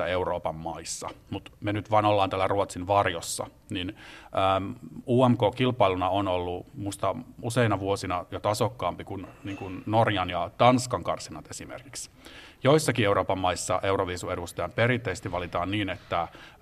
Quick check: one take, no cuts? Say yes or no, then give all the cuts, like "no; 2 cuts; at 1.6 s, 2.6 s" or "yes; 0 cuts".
yes; 0 cuts